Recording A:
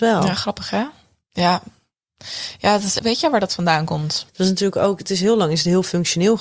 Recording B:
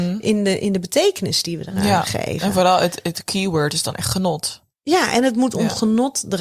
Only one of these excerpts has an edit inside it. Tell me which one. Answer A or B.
A